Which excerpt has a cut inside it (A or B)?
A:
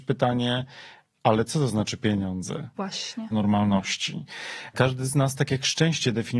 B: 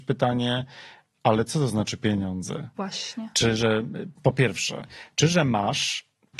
A